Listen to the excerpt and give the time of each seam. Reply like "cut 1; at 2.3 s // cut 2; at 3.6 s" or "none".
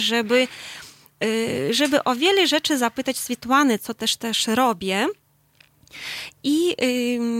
none